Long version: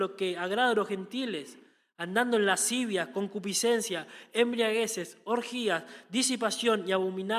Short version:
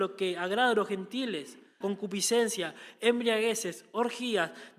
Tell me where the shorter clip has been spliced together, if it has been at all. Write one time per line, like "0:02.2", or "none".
0:01.8